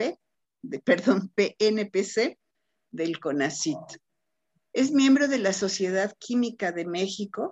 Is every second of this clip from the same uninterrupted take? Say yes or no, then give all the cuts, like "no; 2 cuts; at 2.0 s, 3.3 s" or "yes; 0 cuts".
yes; 0 cuts